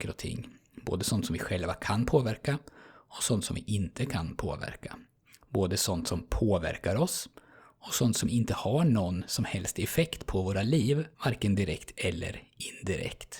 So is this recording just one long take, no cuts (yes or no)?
no